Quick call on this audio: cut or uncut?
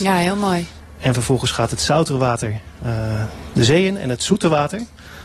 uncut